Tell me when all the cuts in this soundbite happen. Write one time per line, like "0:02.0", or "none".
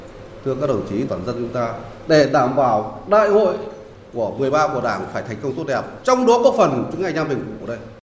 0:01.1